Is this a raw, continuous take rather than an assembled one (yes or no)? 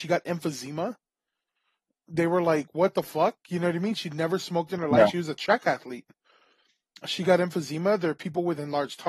yes